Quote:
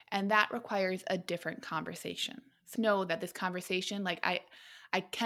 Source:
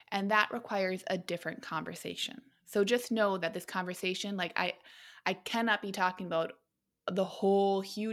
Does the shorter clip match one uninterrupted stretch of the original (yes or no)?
no